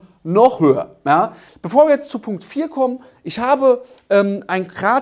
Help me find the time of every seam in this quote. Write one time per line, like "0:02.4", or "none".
0:01.5